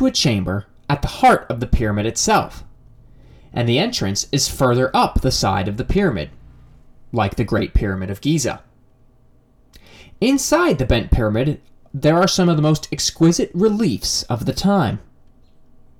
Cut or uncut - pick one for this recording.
uncut